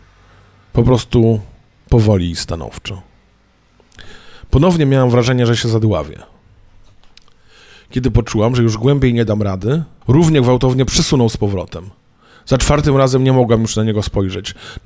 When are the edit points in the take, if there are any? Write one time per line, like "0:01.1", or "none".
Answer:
0:10.0